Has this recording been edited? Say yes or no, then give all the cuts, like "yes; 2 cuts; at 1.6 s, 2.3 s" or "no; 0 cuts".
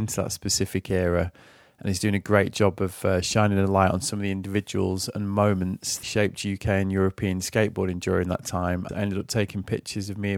yes; 2 cuts; at 6.0 s, 8.9 s